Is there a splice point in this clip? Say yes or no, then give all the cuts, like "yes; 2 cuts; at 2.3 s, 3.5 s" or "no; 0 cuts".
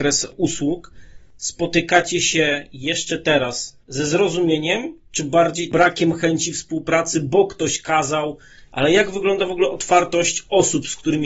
yes; 2 cuts; at 3.8 s, 8.7 s